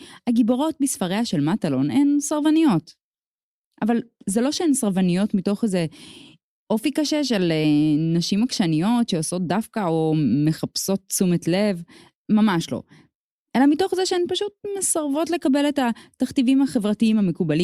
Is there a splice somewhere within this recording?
no; 0 cuts

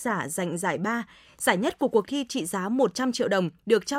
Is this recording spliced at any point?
no; 0 cuts

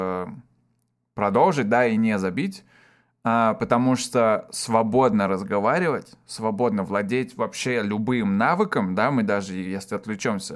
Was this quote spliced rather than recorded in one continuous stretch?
no; 0 cuts

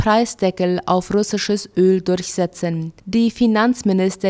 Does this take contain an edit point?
yes; 1 cut; at 3.0 s

